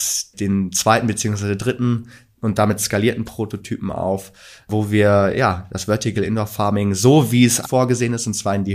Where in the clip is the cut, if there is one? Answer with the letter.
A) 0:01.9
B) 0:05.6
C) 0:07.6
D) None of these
C